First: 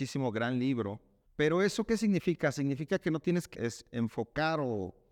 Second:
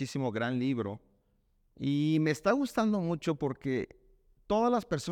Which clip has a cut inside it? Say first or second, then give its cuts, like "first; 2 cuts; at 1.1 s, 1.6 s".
first; 2 cuts; at 1.3 s, 3.5 s